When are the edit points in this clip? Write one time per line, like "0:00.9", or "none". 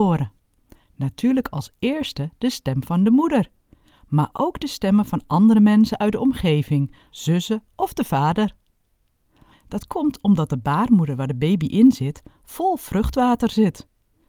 0:07.1
0:09.5

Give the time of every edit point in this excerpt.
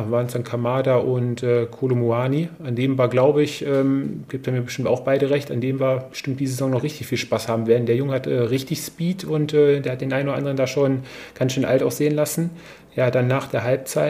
none

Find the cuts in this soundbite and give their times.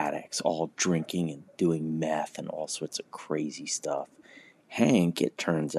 0:04.6

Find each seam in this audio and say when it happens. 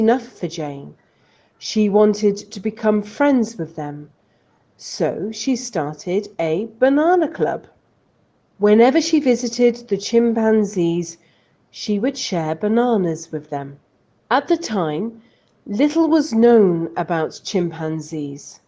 none

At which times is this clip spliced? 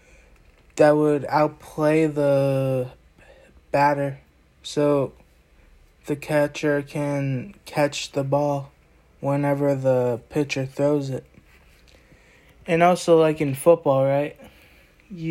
none

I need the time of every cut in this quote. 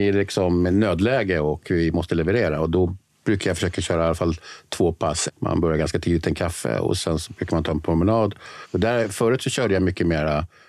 0:05.3
0:08.6

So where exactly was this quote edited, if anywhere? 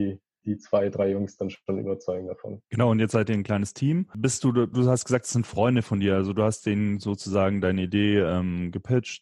0:04.7

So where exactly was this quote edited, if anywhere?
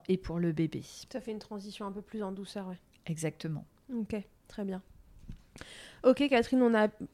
none

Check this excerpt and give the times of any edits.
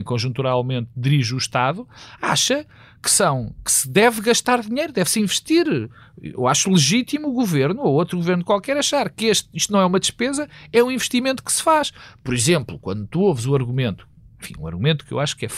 none

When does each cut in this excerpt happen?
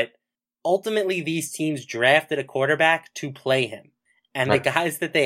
none

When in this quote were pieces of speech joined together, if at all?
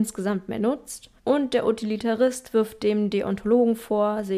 0:01.2

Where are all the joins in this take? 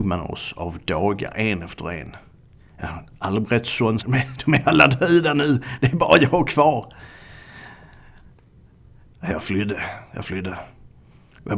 0:04.0

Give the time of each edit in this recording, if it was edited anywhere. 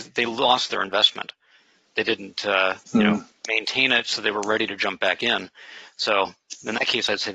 0:02.8

